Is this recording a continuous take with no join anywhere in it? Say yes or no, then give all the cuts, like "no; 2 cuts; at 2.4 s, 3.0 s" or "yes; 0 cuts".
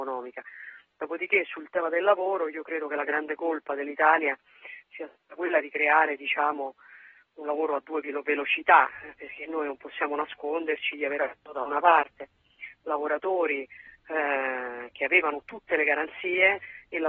yes; 0 cuts